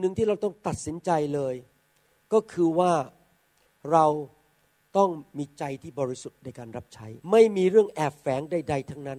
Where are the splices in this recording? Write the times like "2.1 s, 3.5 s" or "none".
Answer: 7.2 s